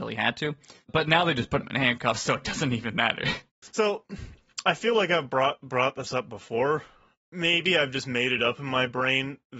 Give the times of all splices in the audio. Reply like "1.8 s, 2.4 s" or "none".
3.5 s